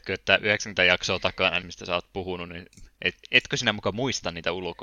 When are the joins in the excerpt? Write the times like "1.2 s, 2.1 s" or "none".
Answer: 1.6 s